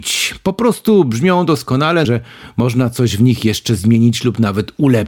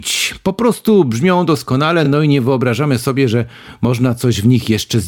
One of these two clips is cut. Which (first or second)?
first